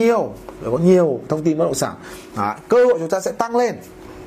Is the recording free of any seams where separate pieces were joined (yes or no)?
yes